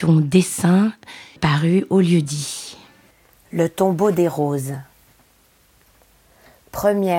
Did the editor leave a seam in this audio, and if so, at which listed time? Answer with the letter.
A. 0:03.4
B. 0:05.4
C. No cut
C